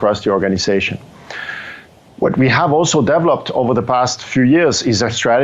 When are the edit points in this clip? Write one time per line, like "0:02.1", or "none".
none